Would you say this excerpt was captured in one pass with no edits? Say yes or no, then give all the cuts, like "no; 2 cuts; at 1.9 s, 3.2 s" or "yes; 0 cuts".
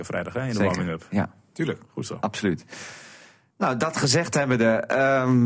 yes; 0 cuts